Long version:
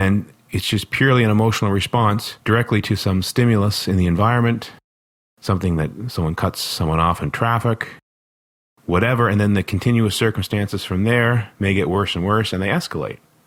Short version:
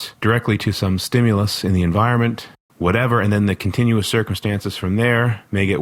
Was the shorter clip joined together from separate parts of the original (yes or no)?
yes